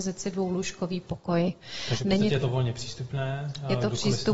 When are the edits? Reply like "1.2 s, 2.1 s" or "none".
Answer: none